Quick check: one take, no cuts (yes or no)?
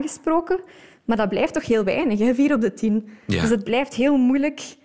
yes